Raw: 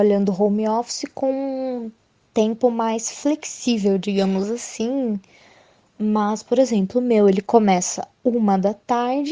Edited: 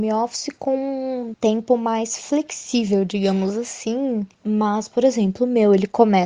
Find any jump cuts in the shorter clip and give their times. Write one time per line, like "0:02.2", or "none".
0:01.3
0:04.3